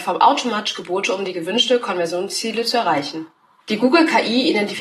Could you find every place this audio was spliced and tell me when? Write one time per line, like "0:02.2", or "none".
0:03.6